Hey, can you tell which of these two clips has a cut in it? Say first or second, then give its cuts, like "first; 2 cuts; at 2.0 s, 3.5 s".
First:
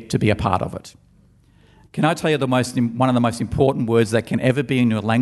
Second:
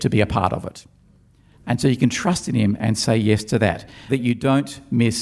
second; 2 cuts; at 1.5 s, 4.1 s